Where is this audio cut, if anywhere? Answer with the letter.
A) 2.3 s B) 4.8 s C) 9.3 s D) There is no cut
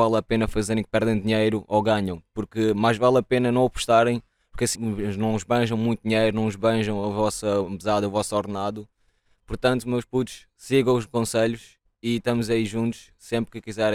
B